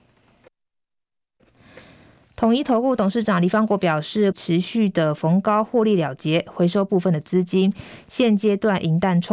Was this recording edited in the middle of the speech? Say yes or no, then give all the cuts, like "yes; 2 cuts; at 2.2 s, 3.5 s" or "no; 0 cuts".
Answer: yes; 1 cut; at 4.3 s